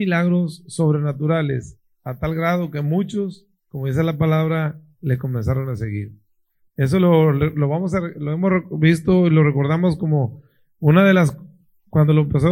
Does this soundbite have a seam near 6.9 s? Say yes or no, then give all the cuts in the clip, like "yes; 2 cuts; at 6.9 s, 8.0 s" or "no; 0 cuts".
no; 0 cuts